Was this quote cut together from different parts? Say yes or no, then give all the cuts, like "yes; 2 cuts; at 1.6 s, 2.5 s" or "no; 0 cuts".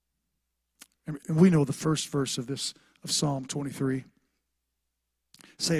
yes; 1 cut; at 1.2 s